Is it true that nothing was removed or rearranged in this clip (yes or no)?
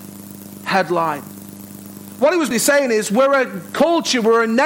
no